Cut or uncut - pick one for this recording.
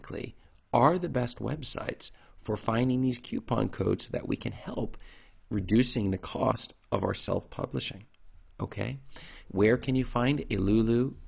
cut